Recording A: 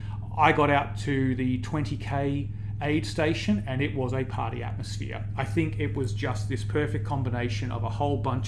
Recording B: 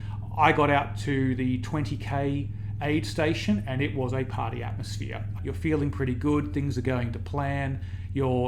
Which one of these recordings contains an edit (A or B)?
B